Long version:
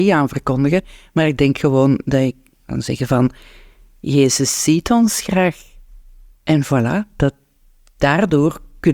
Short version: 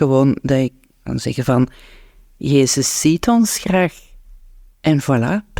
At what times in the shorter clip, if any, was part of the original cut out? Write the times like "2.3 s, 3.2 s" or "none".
none